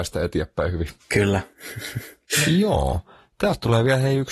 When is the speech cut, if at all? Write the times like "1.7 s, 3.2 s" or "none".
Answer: none